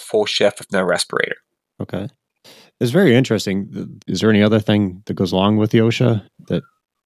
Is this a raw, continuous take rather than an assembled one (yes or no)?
no